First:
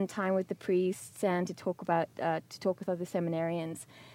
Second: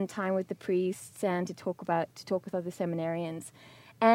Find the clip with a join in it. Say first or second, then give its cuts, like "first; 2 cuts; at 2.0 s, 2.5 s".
second; 1 cut; at 2.1 s